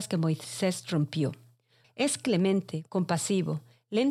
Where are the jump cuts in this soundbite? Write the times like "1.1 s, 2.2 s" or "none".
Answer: 1.8 s